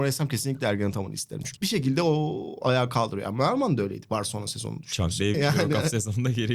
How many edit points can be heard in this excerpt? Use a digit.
2